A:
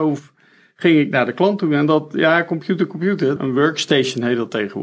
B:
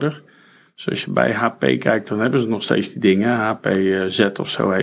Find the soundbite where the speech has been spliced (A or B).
A